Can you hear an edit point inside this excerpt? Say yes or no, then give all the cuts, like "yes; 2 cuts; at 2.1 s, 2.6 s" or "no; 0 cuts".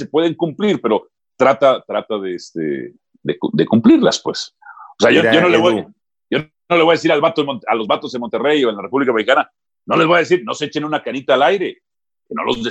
no; 0 cuts